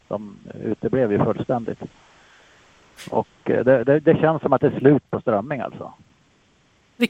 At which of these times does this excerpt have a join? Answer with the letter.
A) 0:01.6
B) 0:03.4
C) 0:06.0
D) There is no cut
D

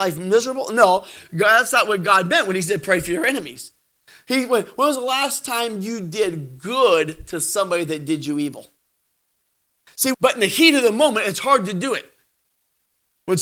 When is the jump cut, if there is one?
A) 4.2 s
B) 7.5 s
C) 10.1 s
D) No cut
C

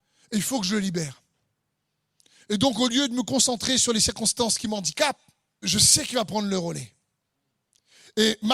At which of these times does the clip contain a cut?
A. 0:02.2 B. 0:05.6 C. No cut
B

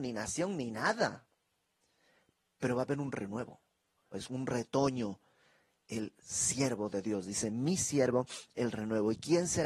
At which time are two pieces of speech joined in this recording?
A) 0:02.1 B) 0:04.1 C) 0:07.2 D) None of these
B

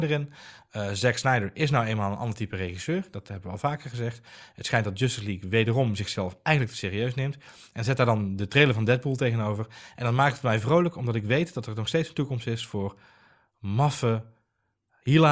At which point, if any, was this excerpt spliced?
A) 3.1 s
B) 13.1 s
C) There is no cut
C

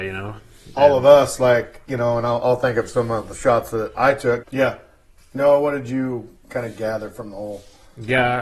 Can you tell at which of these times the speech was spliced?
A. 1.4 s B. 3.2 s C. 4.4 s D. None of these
C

